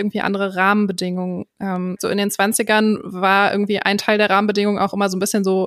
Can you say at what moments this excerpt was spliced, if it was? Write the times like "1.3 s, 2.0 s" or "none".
2.0 s